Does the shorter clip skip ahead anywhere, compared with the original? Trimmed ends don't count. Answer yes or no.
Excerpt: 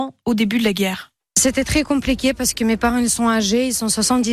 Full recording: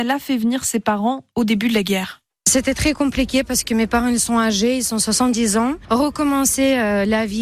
no